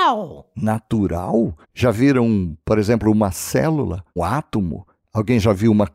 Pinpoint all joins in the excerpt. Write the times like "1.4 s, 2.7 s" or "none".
1.6 s, 4.2 s